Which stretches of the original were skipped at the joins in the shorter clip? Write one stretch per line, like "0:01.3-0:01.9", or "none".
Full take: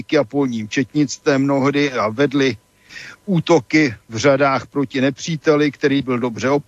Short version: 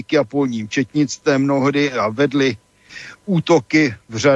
none